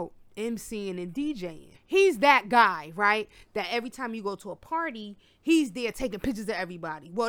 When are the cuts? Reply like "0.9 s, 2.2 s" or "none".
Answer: 1.7 s